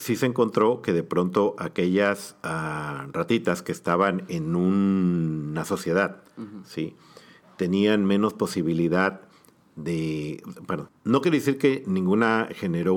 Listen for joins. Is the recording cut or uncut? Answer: cut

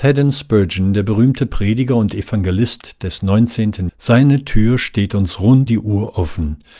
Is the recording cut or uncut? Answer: cut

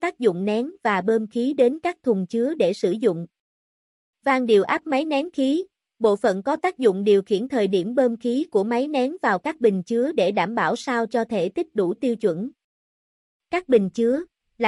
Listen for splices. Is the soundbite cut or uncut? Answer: uncut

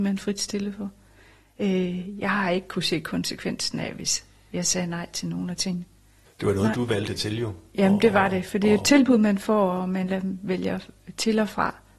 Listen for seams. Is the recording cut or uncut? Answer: cut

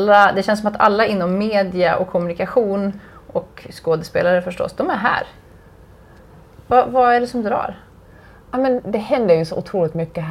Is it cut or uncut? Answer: uncut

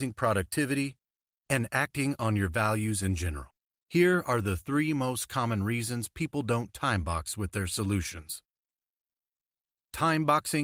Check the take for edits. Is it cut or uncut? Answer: cut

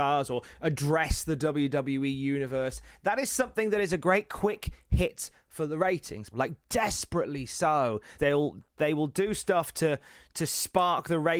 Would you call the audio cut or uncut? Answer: cut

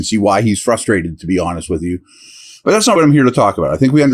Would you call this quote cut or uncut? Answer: cut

